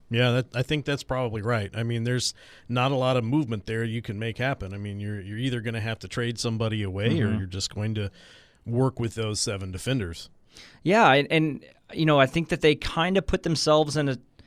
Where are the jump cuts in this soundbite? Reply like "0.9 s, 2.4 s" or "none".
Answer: none

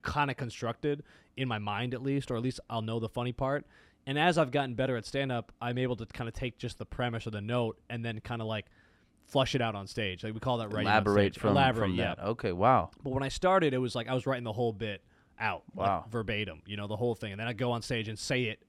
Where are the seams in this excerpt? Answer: none

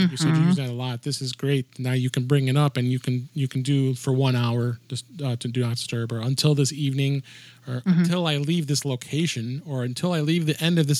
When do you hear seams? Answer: none

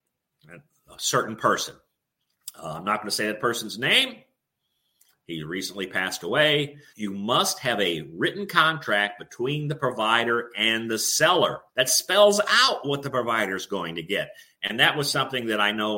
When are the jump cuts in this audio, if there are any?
6.9 s, 11.7 s

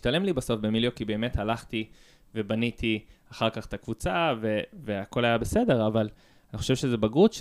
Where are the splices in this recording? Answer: none

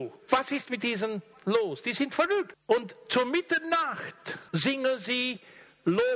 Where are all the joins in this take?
2.5 s, 4.5 s

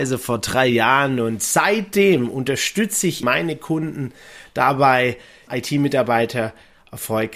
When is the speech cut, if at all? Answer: 3.2 s, 5.5 s

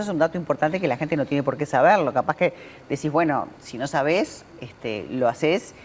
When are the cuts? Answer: 3.6 s

